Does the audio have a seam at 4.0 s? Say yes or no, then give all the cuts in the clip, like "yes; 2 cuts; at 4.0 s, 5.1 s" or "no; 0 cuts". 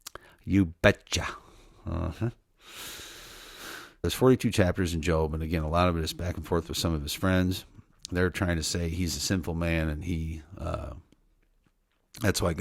yes; 1 cut; at 4.0 s